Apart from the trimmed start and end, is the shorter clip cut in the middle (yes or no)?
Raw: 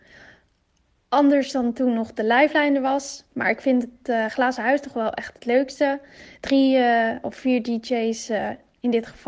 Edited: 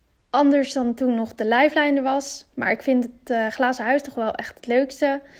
no